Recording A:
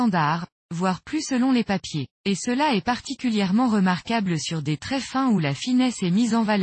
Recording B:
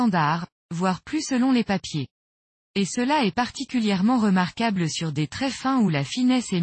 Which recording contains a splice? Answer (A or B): A